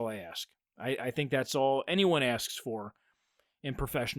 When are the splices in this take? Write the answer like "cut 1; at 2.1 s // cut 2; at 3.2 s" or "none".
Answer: none